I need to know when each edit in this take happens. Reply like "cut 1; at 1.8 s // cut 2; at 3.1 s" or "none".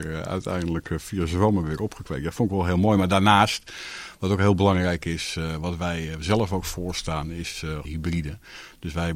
cut 1; at 7.8 s